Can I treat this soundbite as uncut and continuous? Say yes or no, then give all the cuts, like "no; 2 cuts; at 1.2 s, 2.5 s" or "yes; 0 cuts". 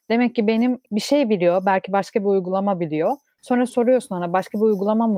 yes; 0 cuts